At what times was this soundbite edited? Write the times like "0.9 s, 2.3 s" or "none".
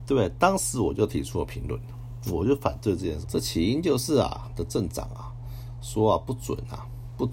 3.2 s, 4.4 s